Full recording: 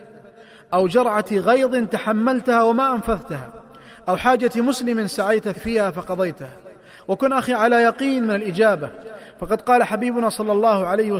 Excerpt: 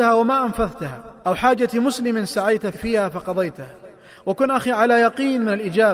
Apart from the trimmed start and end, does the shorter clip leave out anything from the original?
yes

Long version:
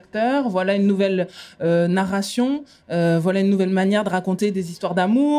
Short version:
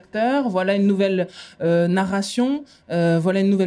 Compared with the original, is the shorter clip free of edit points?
yes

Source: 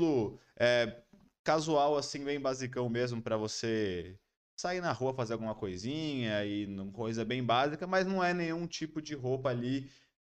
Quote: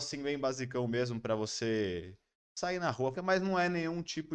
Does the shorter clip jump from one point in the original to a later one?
yes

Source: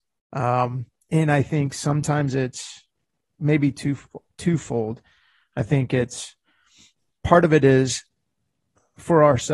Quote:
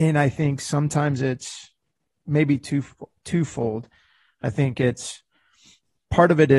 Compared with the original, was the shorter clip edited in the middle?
no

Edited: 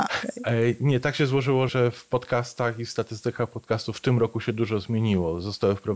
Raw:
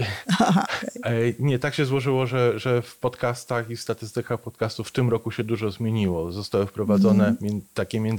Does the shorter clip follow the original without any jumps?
no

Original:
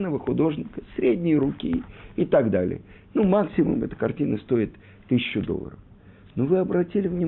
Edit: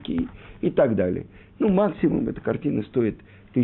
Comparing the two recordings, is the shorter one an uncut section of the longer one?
yes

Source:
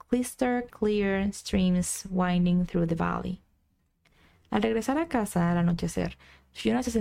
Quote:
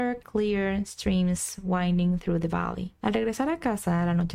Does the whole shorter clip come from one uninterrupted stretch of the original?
no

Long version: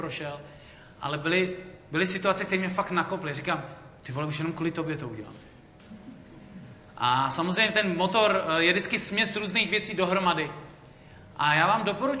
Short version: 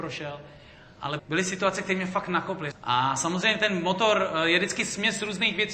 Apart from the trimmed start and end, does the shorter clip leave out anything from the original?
yes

